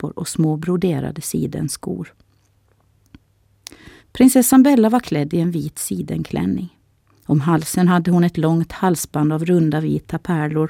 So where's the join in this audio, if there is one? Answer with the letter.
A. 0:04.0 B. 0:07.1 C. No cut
A